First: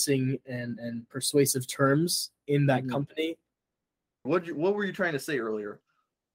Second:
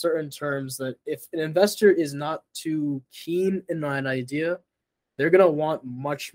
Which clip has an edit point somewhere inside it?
first; 1 cut; at 4.3 s

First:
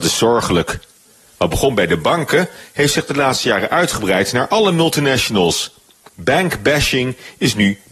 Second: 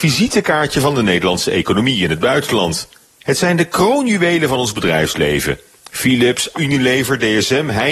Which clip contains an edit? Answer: second; 2 cuts; at 3.0 s, 6.5 s

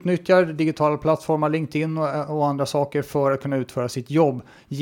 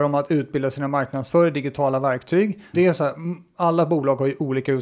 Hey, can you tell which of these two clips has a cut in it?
second; 1 cut; at 2.7 s

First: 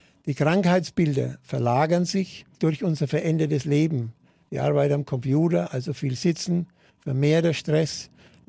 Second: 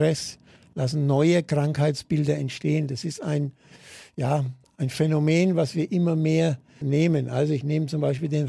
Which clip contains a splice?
second; 1 cut; at 6.8 s

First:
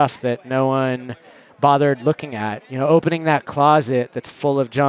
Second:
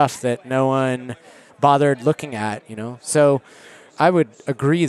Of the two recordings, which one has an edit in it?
second; 1 cut; at 2.6 s

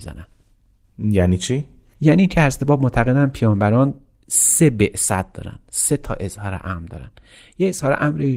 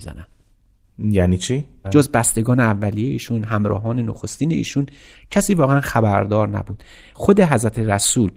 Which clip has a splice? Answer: second; 1 cut; at 1.8 s

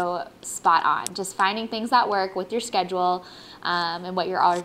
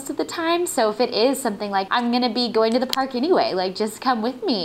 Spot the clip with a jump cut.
second; 1 cut; at 1.9 s

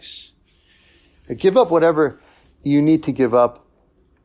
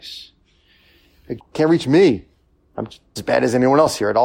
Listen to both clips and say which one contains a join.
second; 2 cuts; at 1.4 s, 3.2 s

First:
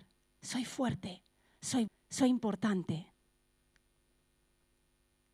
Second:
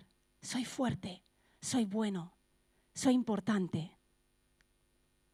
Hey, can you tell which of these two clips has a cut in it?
first; 1 cut; at 1.9 s

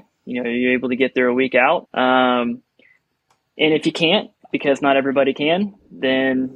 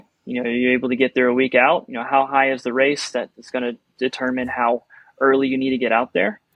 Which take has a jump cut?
first; 1 cut; at 1.8 s

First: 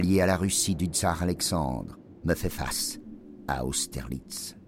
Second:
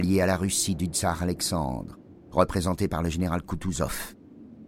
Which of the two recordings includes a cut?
first; 1 cut; at 2.2 s

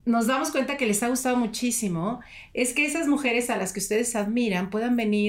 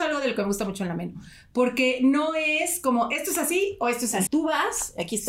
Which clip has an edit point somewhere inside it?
second; 1 cut; at 4.3 s

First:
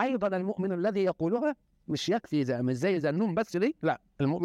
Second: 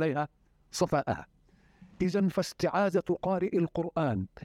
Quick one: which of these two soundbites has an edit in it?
second; 1 cut; at 1.9 s

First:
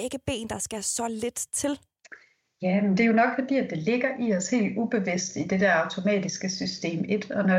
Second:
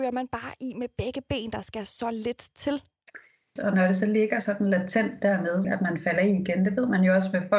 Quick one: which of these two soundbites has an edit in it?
second; 2 cuts; at 3.6 s, 5.6 s

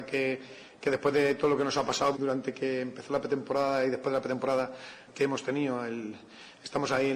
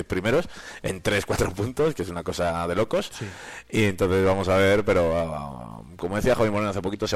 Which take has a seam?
first; 2 cuts; at 2.1 s, 5.1 s

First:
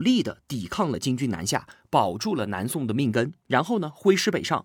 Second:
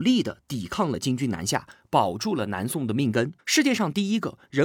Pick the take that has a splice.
second; 1 cut; at 3.4 s

